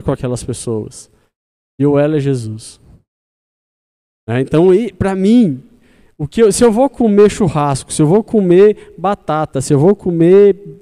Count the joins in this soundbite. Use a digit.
0